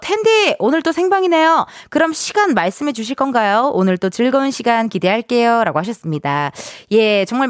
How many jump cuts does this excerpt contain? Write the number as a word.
zero